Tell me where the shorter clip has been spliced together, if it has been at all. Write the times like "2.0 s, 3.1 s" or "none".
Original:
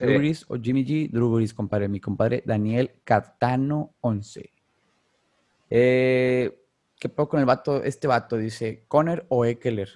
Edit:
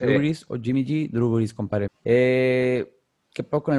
1.9 s

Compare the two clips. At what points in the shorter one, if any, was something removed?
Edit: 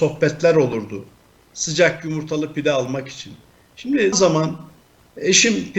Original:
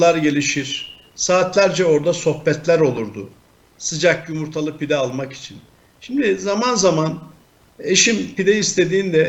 4.1 s

